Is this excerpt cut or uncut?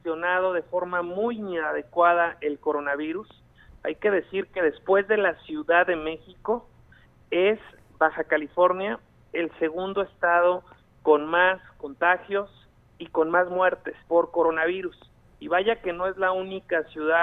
cut